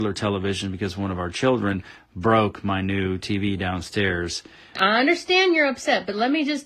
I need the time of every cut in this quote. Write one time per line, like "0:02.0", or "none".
0:04.8

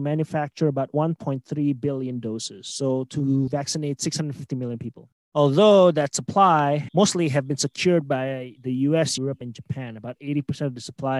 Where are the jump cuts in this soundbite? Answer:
0:09.2

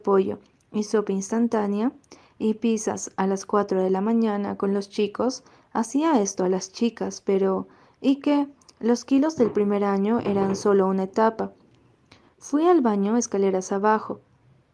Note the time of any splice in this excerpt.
none

